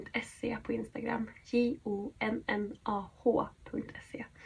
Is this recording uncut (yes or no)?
yes